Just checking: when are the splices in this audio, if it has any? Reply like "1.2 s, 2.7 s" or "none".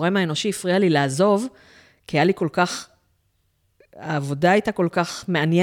none